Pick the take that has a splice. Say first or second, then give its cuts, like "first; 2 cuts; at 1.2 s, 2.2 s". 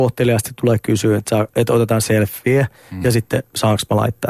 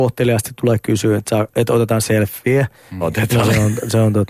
second; 1 cut; at 3.0 s